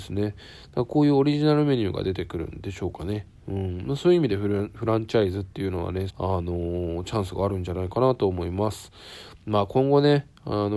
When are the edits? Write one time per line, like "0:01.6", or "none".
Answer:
0:06.1